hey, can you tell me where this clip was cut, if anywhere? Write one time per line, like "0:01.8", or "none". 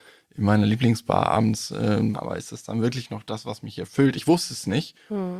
0:02.1